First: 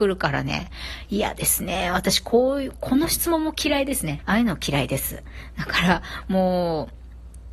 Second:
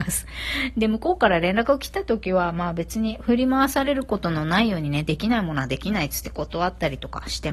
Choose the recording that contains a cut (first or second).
first